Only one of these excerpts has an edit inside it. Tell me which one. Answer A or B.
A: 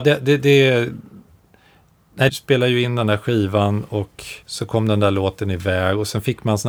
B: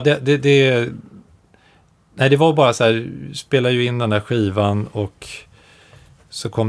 A